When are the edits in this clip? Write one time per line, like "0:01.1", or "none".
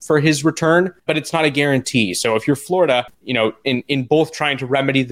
0:01.1